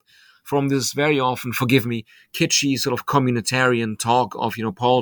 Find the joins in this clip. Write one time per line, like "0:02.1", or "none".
none